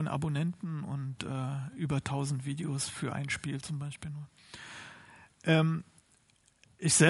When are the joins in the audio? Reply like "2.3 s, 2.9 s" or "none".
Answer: none